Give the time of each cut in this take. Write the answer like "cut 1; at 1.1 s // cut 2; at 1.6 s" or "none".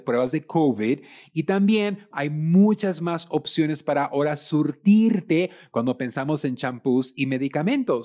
cut 1; at 2.1 s